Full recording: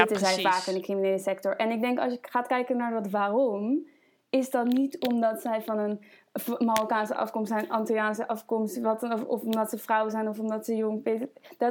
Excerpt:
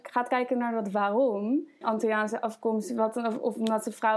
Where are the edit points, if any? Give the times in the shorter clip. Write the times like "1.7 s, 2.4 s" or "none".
1.8 s